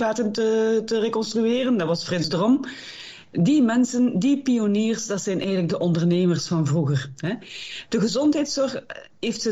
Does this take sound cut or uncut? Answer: uncut